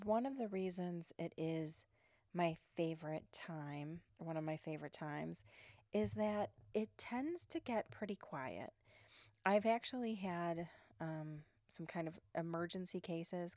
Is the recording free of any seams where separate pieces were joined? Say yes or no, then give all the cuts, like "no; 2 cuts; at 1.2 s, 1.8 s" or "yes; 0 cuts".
yes; 0 cuts